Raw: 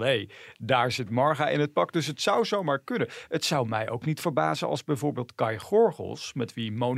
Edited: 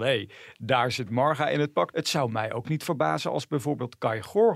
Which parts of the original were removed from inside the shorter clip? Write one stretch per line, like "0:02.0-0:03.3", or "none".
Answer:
0:01.9-0:03.3

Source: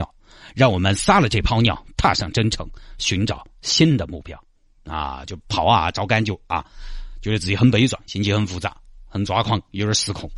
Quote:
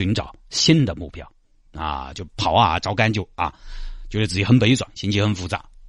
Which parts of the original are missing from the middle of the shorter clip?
none

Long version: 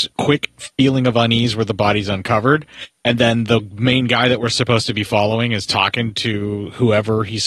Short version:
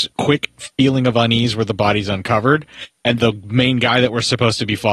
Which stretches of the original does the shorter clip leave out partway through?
0:03.2-0:03.5

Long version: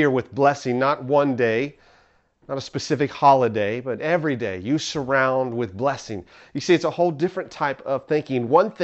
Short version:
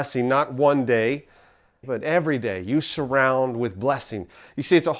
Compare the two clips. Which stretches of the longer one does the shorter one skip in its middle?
0:02.3-0:03.8

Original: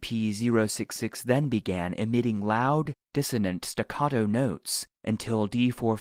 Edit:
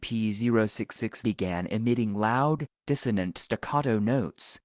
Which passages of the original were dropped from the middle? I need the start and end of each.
0:01.2-0:01.5

